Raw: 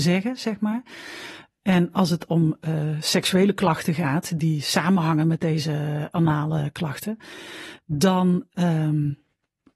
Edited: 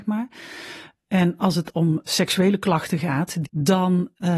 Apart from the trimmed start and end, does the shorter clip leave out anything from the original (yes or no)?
yes